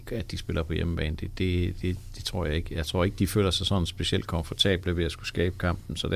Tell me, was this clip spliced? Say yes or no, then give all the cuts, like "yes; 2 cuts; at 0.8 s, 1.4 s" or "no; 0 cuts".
no; 0 cuts